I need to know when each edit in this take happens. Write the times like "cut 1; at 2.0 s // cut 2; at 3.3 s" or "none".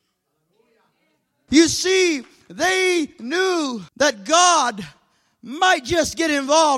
cut 1; at 1.5 s // cut 2; at 3.9 s